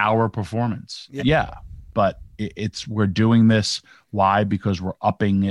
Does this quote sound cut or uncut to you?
cut